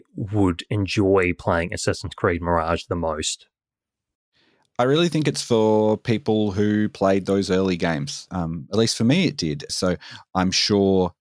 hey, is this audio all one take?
no; 2 cuts; at 8.3 s, 9.7 s

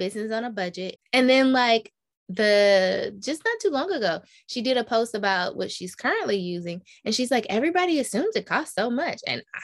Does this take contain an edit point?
yes; 1 cut; at 1.0 s

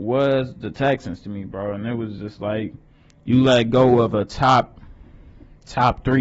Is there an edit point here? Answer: no; 0 cuts

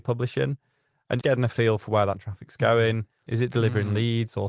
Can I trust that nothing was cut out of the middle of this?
no; 2 cuts; at 1.2 s, 3.3 s

